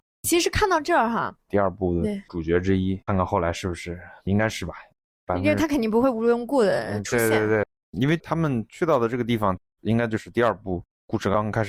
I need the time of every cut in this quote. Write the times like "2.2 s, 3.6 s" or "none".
1.4 s, 3.1 s